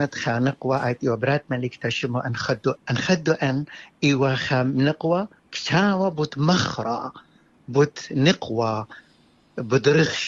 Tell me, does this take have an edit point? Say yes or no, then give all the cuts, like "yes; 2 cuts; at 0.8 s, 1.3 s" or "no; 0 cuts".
yes; 1 cut; at 2.8 s